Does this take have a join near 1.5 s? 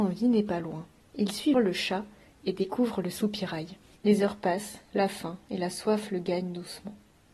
yes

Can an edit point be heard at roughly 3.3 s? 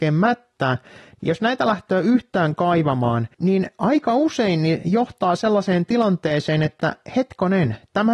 yes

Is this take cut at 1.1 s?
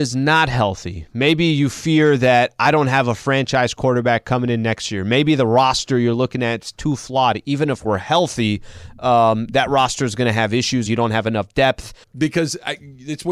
no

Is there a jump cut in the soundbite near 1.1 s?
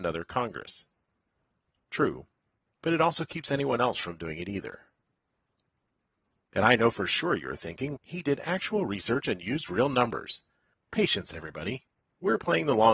no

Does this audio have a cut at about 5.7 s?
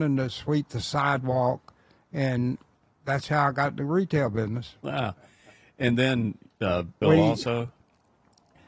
no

